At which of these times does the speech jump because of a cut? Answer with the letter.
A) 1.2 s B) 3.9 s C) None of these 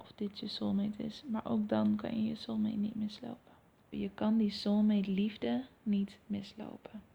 B